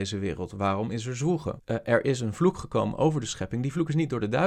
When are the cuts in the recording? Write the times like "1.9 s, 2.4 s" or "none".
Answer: 1.6 s